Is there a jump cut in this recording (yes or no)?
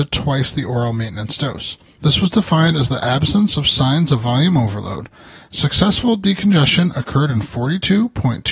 yes